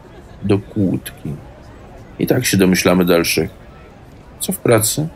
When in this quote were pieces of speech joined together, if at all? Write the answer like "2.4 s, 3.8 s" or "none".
none